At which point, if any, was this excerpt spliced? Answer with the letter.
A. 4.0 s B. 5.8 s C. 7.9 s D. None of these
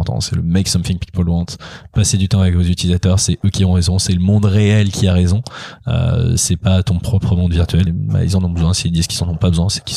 C